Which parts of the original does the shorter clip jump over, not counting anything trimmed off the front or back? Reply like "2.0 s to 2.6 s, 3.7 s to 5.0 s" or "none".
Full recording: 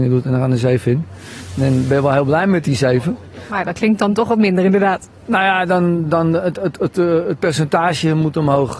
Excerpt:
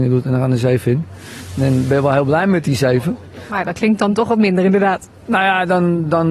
none